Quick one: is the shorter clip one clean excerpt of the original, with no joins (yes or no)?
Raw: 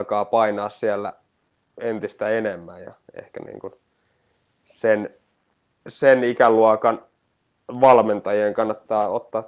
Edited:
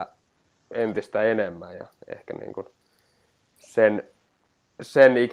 yes